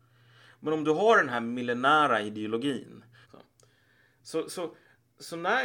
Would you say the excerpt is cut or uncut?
cut